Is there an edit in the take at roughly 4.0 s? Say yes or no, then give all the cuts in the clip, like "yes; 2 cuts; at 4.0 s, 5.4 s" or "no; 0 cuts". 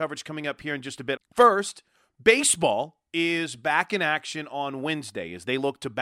no; 1 cut; at 1.2 s